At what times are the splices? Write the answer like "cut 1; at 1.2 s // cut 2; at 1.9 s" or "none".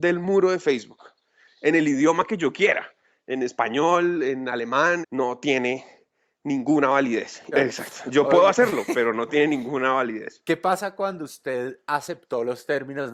cut 1; at 5.0 s // cut 2; at 7.5 s